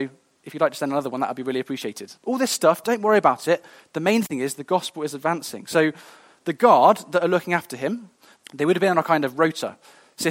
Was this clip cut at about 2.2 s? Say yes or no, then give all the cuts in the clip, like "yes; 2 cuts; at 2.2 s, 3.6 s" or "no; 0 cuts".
yes; 2 cuts; at 2.2 s, 8.4 s